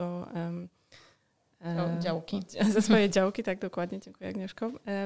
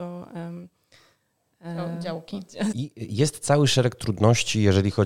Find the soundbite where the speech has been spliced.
second; 1 cut; at 2.7 s

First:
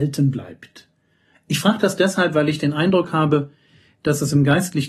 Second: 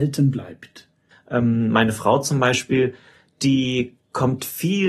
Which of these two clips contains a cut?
second; 1 cut; at 1.1 s

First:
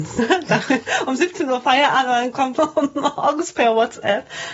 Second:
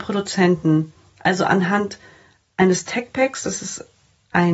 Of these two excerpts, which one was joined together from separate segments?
first; 1 cut; at 2.6 s

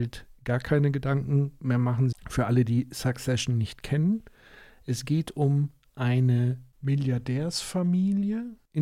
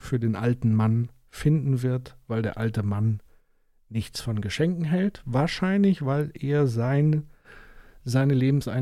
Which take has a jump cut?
first; 1 cut; at 2.1 s

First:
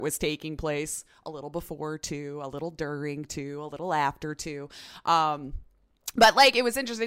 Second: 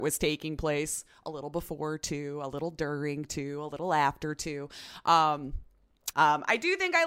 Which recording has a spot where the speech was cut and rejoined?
second; 1 cut; at 6.1 s

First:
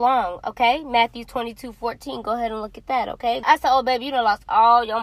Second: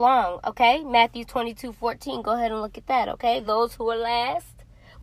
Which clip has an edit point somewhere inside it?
first; 1 cut; at 3.4 s

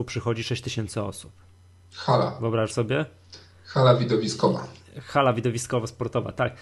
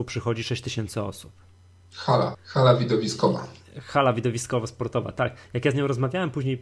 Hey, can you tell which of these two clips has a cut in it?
second; 1 cut; at 2.3 s

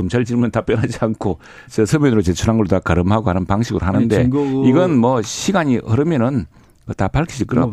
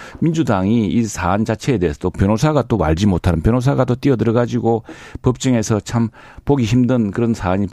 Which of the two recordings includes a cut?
first; 1 cut; at 1.7 s

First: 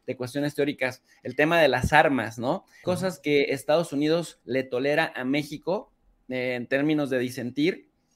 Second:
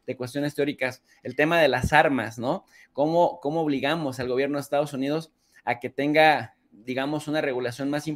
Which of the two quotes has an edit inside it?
first; 1 cut; at 2.8 s

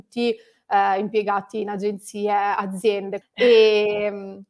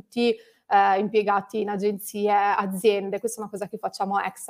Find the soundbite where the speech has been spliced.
first; 1 cut; at 3.2 s

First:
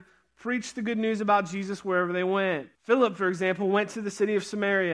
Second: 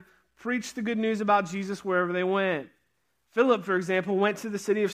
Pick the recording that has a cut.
first; 1 cut; at 2.7 s

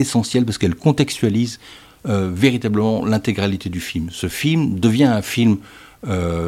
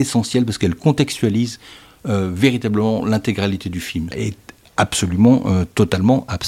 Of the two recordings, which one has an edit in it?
second; 1 cut; at 4.1 s

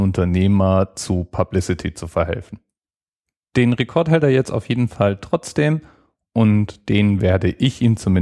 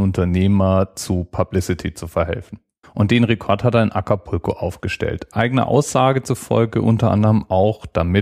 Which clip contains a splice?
second; 1 cut; at 2.8 s

